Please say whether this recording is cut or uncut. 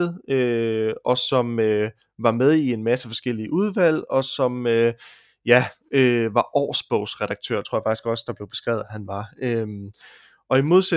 uncut